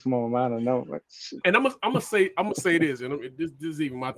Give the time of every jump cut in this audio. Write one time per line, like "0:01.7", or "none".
0:01.4